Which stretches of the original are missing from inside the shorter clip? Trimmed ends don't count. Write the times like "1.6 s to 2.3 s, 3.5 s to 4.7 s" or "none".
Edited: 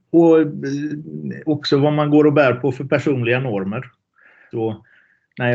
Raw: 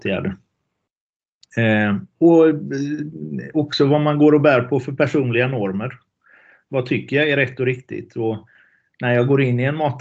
6.6 s to 8.1 s